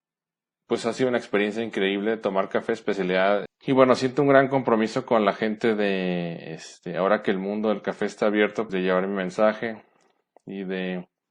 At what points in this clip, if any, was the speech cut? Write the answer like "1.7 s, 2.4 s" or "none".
3.5 s, 8.7 s